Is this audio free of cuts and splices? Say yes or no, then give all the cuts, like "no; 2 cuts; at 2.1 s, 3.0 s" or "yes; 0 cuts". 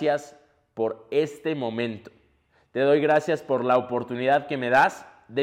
yes; 0 cuts